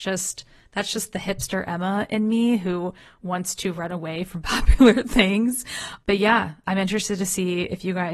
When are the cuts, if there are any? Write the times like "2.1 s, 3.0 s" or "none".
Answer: 6.6 s